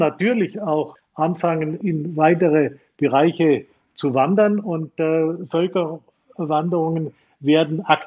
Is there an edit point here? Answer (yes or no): no